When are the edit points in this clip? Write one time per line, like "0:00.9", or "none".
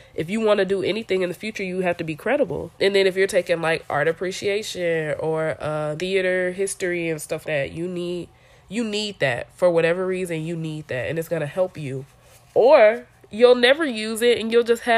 0:02.7
0:06.0
0:07.4